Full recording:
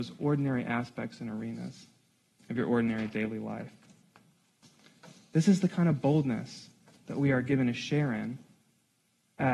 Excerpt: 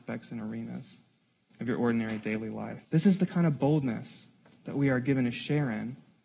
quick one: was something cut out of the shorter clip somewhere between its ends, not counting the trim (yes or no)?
yes